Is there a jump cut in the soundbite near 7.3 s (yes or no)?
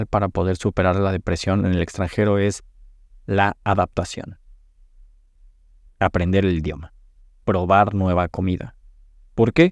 yes